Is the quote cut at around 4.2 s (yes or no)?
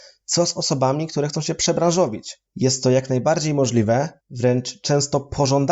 yes